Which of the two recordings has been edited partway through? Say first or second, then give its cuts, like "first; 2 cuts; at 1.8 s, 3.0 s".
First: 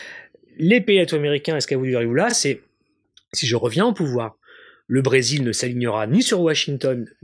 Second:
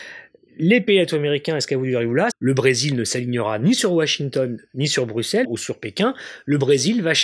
second; 2 cuts; at 2.3 s, 5.4 s